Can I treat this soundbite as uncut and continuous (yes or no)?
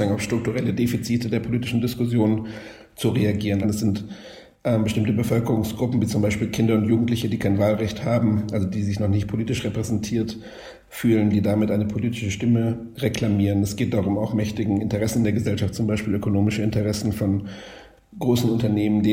no